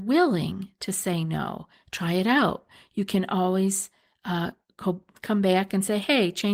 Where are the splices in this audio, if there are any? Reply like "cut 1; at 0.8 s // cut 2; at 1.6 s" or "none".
none